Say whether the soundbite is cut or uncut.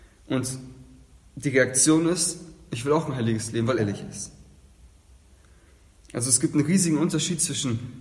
cut